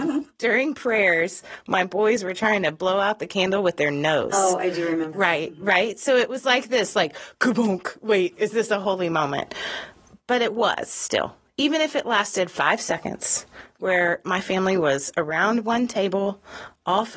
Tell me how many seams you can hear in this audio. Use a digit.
1